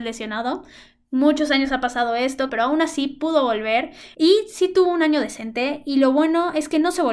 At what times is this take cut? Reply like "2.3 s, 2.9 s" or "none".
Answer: 2.5 s